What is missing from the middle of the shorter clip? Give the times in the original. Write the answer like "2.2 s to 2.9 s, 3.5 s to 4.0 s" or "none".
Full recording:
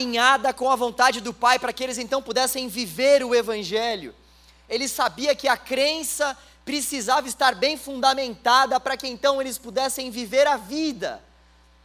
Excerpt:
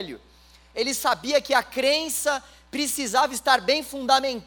none